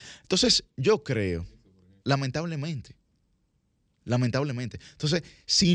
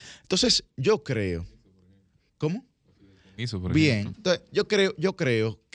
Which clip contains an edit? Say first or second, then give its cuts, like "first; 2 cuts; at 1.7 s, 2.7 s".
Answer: first; 1 cut; at 2.0 s